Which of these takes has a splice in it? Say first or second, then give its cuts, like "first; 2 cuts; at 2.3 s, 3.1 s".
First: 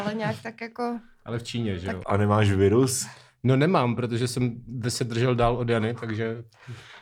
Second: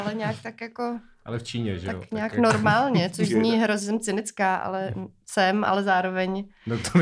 first; 1 cut; at 2.0 s